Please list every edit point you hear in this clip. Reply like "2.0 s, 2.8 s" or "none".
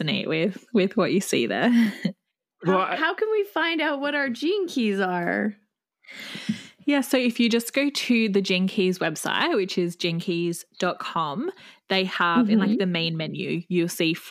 none